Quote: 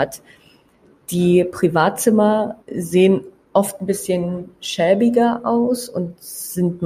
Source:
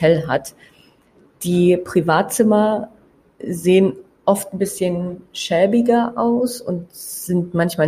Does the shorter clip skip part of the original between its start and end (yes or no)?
yes